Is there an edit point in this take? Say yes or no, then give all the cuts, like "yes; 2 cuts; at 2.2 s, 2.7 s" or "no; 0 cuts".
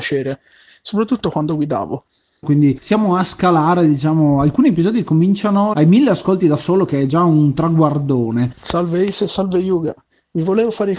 yes; 3 cuts; at 2.4 s, 5.7 s, 8.5 s